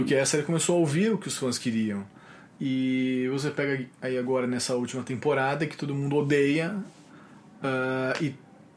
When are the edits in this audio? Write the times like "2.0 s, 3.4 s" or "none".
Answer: none

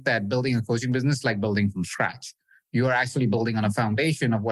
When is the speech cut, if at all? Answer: 2.6 s

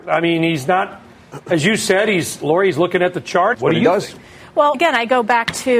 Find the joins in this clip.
3.5 s, 4.7 s

